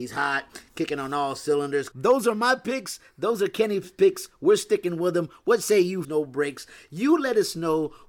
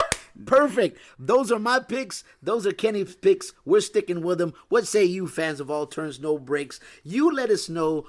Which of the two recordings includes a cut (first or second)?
first